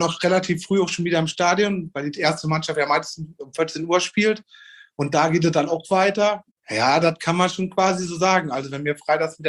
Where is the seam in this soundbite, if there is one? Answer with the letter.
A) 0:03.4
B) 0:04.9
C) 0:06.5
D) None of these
C